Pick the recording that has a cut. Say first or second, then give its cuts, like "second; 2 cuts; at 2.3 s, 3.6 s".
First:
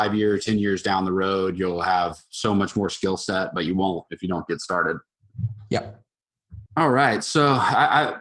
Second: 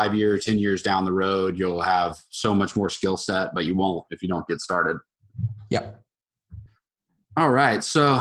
first; 1 cut; at 6.7 s